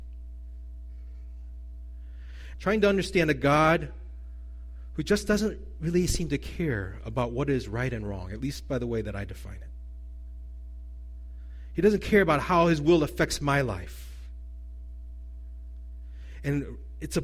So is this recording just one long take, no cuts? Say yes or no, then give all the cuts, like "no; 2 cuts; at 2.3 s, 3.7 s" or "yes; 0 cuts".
no; 1 cut; at 2.5 s